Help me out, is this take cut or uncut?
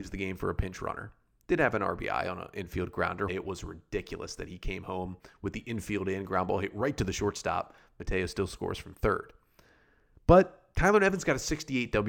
cut